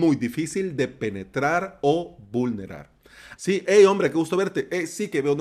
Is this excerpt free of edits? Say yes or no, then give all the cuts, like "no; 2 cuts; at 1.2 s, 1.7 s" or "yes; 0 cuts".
no; 1 cut; at 3.4 s